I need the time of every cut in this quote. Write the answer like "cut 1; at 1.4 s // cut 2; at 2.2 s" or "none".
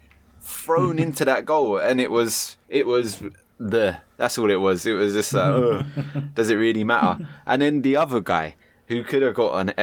cut 1; at 2.6 s